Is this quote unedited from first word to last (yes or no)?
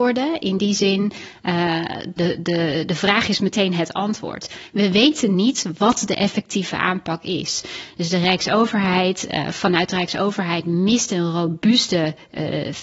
no